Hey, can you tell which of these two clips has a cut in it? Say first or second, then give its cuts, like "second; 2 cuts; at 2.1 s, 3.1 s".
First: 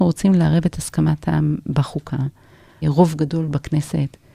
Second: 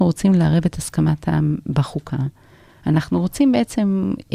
first; 1 cut; at 2.8 s